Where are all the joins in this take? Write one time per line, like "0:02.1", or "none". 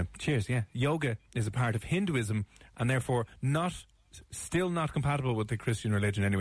none